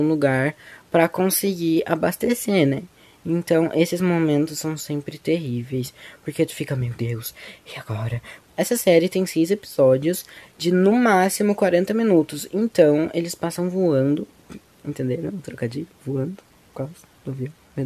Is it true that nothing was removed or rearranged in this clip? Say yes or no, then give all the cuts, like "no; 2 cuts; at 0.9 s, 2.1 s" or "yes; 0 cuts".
no; 1 cut; at 8.4 s